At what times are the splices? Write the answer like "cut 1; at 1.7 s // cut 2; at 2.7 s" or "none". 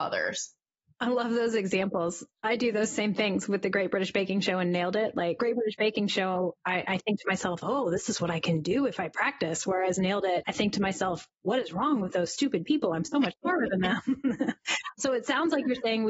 none